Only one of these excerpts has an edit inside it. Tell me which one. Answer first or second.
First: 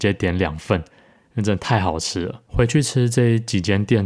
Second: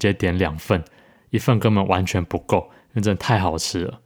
first